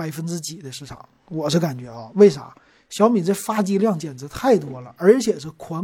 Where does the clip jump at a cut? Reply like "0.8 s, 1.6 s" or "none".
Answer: none